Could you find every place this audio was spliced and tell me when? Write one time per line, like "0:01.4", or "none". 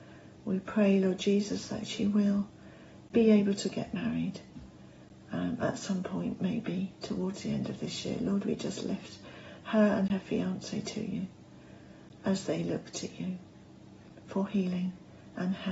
none